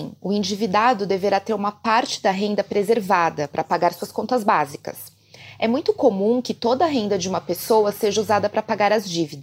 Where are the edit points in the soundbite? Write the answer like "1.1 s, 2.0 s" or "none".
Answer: none